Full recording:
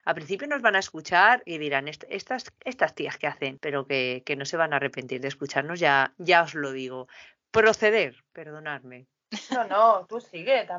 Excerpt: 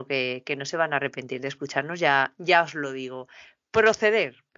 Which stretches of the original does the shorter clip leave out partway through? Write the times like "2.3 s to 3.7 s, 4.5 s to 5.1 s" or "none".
none